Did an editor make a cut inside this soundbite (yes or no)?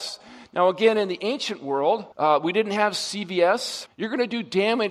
yes